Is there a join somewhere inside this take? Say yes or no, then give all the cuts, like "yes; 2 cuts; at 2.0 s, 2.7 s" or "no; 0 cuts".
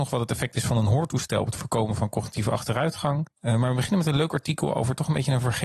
yes; 1 cut; at 3.3 s